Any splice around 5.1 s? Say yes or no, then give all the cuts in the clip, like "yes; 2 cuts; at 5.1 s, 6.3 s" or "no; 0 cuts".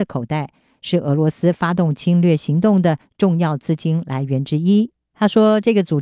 yes; 1 cut; at 5.1 s